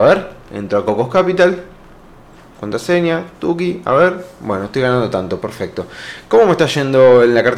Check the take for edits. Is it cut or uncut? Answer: uncut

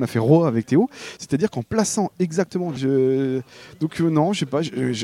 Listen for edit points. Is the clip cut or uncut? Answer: cut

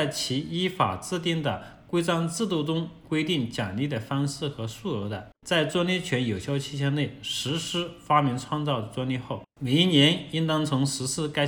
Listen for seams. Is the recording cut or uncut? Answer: cut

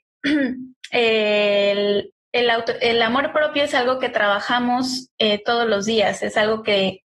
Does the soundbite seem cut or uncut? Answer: uncut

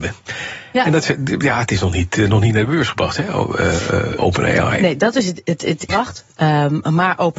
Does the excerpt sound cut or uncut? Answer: cut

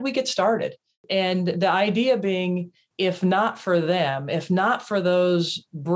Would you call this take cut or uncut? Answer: uncut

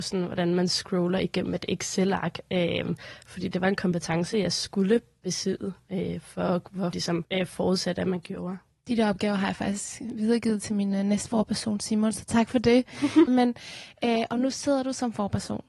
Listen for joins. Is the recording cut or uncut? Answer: cut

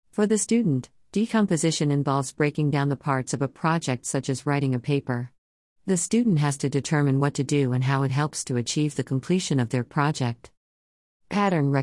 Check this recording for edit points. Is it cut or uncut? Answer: uncut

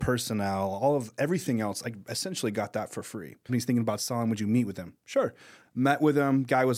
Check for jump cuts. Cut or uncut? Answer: cut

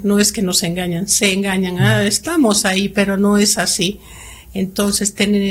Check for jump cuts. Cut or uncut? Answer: uncut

